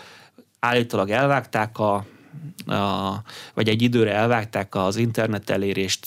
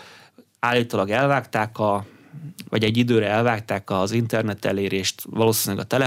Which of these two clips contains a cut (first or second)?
second